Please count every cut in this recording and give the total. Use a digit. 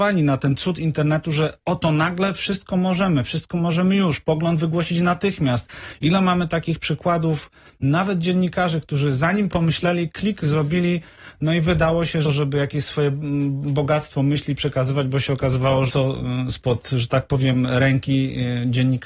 3